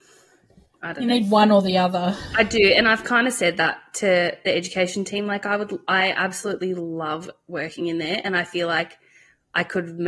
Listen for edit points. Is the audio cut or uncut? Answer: uncut